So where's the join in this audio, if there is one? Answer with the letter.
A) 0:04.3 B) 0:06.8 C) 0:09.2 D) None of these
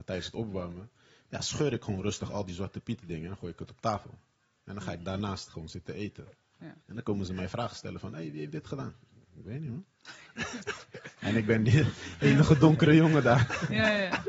B